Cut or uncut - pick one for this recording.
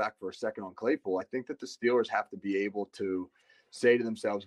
uncut